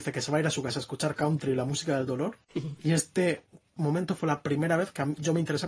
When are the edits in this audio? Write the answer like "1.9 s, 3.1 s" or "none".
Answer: 2.4 s